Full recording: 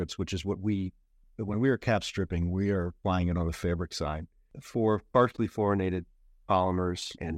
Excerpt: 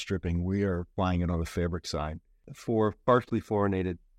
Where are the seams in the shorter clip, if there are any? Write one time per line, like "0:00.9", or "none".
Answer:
none